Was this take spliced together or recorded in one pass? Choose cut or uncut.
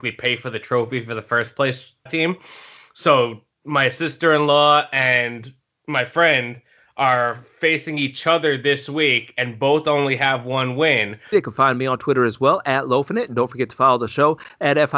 cut